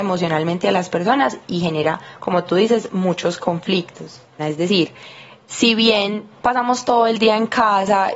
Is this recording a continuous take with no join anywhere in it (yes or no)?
no